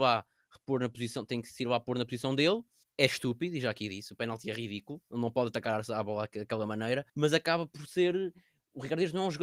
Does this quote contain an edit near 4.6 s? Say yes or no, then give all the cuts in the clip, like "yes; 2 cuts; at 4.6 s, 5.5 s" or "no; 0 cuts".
no; 2 cuts; at 2.8 s, 7.1 s